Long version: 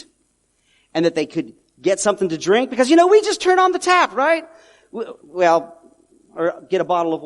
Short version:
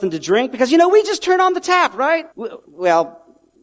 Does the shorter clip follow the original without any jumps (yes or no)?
no